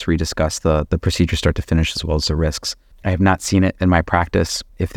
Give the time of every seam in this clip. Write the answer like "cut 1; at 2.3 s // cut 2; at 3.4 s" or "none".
cut 1; at 2.9 s